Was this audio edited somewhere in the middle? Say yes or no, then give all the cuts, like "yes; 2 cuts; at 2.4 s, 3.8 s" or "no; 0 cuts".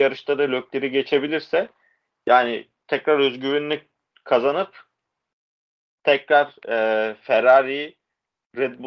no; 0 cuts